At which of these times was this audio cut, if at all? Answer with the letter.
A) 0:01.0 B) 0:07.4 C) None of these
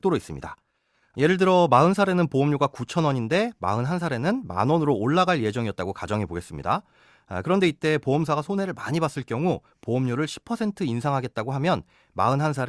C